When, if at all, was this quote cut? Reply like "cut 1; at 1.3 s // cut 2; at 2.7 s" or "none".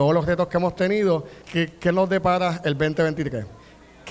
cut 1; at 1.4 s